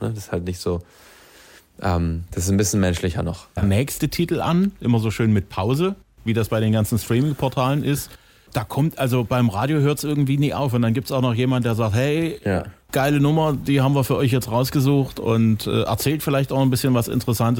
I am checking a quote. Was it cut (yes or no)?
yes